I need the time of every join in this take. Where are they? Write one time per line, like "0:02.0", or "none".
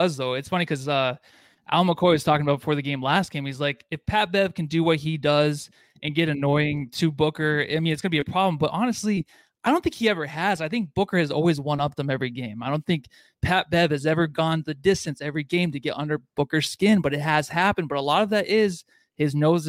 none